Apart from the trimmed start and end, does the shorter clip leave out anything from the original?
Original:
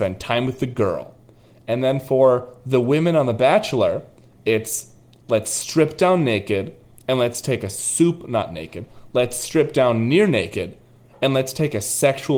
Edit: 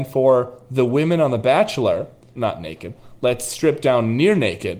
yes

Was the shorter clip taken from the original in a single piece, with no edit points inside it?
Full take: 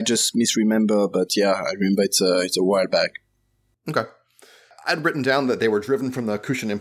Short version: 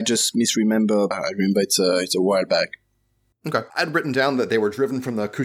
no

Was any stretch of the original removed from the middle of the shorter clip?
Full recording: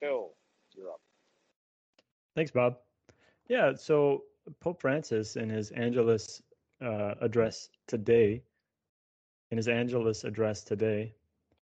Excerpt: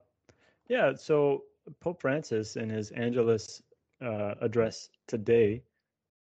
no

